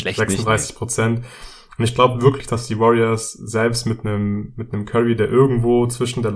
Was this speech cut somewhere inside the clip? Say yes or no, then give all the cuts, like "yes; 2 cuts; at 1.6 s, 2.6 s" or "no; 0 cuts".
no; 0 cuts